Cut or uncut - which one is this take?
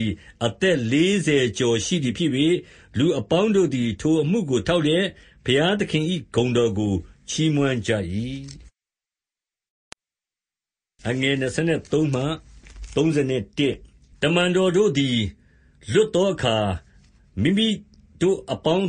uncut